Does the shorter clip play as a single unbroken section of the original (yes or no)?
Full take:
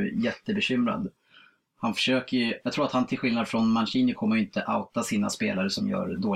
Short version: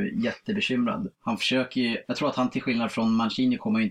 no